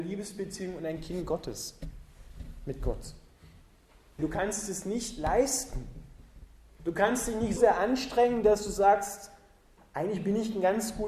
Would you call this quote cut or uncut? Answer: cut